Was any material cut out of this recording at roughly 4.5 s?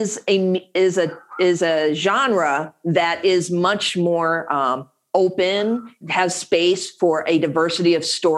no; 1 cut; at 6.0 s

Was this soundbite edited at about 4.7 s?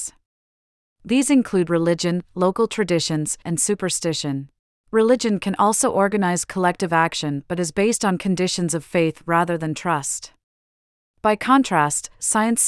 yes; 2 cuts; at 3.4 s, 4.7 s

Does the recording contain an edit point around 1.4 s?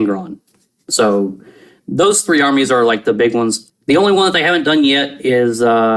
no; 1 cut; at 3.7 s

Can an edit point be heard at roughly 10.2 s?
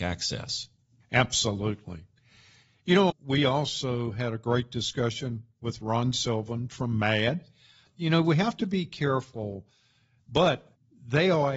yes; 2 cuts; at 3.1 s, 10.2 s

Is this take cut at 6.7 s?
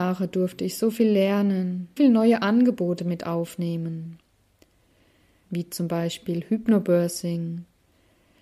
no; 2 cuts; at 2.0 s, 5.5 s

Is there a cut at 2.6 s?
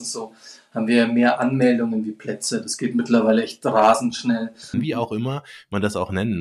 no; 1 cut; at 4.7 s

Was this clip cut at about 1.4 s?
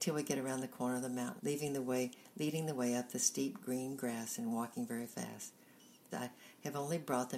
yes; 2 cuts; at 1.4 s, 6.1 s

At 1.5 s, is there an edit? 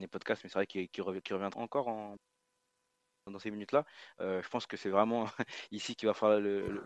yes; 1 cut; at 1.5 s

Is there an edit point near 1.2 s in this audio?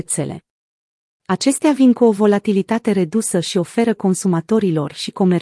yes; 1 cut; at 1.2 s

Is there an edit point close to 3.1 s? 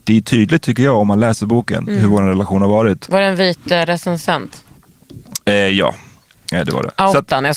yes; 1 cut; at 3.1 s

